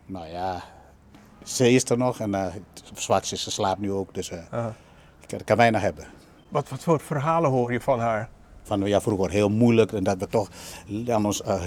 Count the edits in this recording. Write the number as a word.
zero